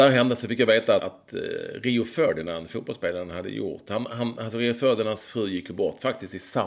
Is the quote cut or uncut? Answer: cut